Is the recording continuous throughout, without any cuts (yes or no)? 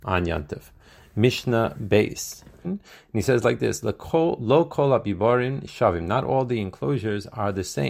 no